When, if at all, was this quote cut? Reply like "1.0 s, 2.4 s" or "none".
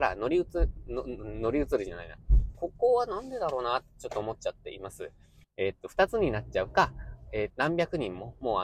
2.5 s, 5.4 s, 7.5 s

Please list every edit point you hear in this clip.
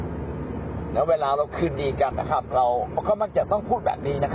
2.1 s

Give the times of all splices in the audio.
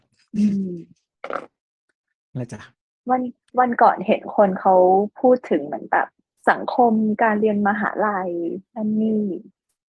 none

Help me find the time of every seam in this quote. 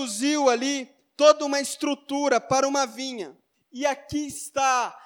3.5 s

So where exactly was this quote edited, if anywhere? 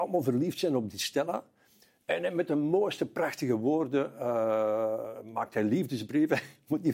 none

